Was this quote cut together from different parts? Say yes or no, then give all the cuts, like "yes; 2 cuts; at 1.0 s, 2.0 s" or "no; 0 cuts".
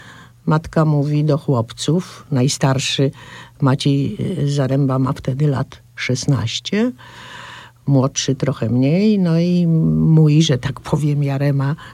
no; 0 cuts